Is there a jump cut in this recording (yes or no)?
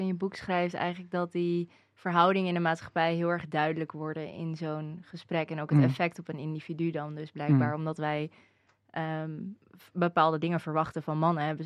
no